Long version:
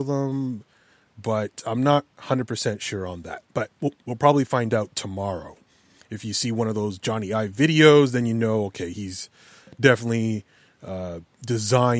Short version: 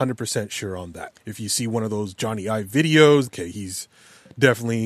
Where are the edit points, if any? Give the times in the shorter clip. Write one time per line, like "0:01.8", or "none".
0:01.1
0:03.3